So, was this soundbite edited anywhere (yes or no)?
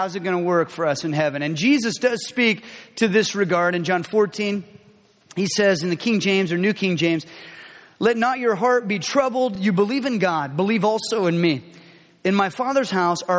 no